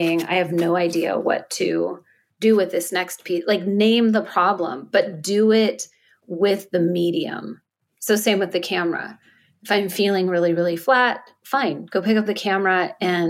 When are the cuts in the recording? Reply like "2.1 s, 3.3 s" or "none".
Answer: none